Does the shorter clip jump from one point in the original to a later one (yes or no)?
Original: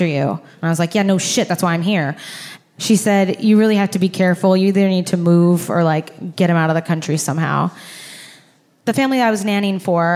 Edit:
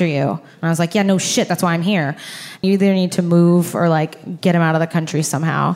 yes